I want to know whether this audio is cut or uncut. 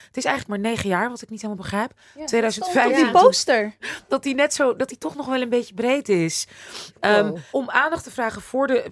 cut